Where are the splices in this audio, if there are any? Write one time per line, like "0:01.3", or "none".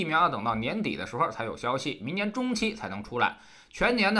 none